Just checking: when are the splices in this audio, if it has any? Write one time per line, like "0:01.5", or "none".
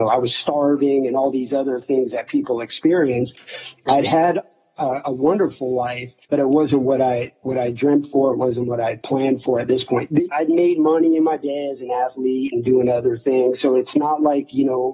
0:06.2
0:10.3